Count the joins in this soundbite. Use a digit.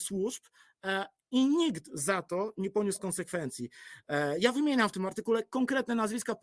0